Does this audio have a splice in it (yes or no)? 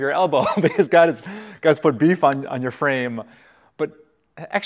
no